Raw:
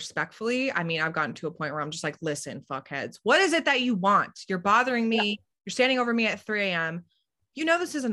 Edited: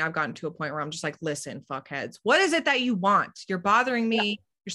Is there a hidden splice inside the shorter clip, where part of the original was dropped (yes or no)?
no